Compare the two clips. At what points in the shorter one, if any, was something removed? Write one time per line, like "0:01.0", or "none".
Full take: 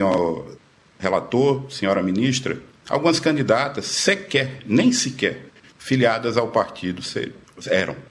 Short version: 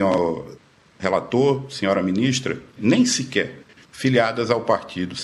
0:02.8